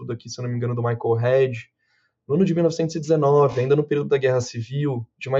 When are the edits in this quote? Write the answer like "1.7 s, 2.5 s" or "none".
none